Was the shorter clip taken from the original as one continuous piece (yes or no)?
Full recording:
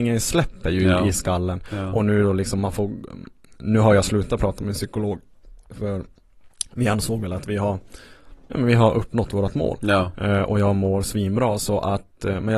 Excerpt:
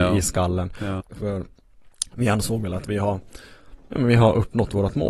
no